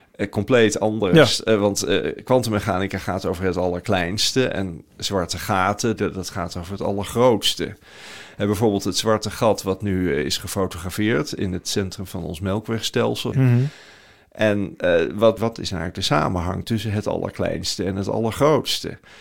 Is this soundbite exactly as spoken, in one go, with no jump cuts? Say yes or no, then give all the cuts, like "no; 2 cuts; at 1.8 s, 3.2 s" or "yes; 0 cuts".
no; 3 cuts; at 6.0 s, 13.3 s, 15.4 s